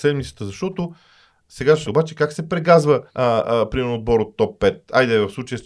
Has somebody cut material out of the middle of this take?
yes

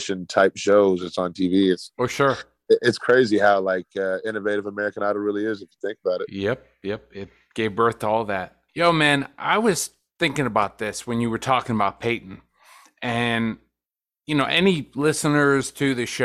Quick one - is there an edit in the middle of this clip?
yes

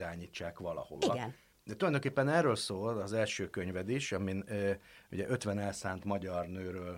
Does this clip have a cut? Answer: no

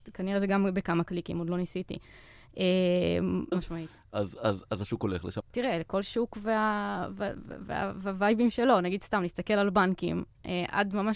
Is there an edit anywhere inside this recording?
yes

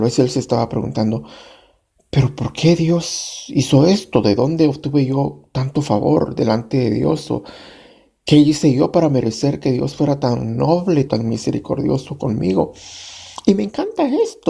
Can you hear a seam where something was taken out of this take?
yes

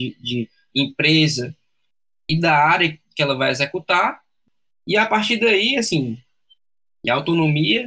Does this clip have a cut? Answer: no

